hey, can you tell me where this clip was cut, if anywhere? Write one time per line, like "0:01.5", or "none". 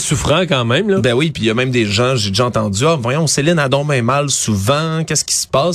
none